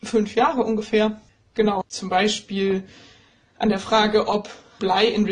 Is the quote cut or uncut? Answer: cut